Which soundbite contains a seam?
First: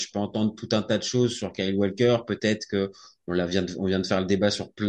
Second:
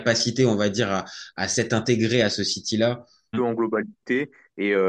second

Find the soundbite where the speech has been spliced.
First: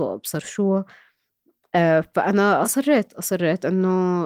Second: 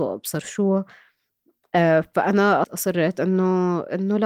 second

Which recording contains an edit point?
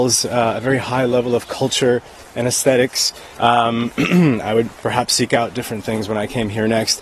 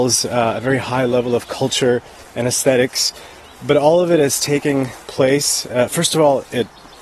first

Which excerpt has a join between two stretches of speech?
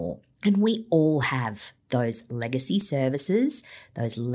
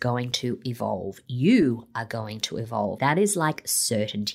second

